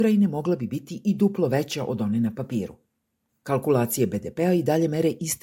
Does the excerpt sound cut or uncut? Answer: cut